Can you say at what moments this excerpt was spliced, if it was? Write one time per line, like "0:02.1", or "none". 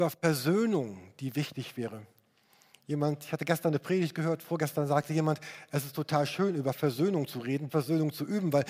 0:07.7